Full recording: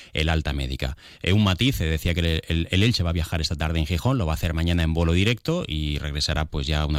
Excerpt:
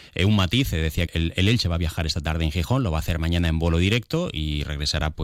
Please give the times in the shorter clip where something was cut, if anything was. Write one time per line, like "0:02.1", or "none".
0:01.1